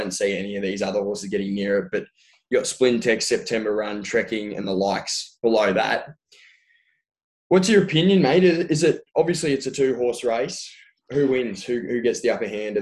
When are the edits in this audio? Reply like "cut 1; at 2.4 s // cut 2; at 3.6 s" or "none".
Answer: none